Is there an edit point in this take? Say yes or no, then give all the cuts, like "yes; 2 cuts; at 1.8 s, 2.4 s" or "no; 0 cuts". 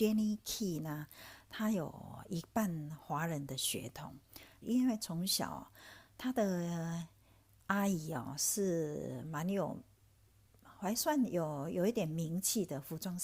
yes; 1 cut; at 4.6 s